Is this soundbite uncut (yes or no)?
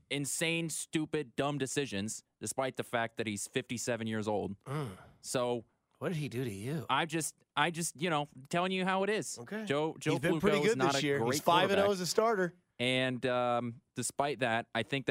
yes